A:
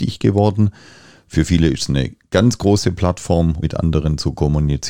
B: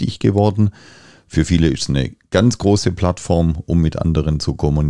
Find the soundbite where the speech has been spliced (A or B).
A